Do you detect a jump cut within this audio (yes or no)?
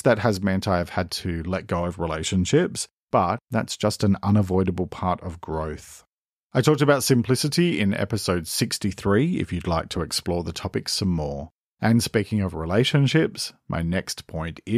no